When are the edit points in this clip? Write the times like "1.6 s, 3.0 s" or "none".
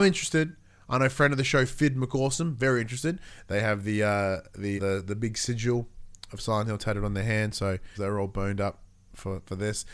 4.8 s, 8.0 s